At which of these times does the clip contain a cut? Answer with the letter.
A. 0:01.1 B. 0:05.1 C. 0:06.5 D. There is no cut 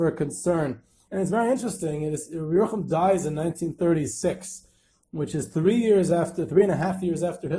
A